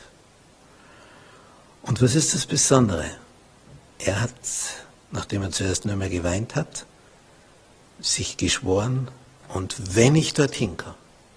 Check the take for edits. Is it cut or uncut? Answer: uncut